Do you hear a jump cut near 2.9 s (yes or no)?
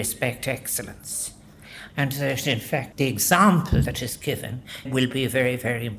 yes